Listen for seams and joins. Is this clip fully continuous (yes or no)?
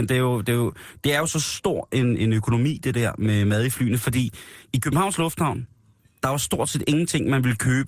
yes